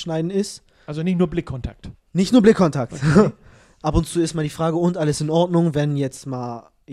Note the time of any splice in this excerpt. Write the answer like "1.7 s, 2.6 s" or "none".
none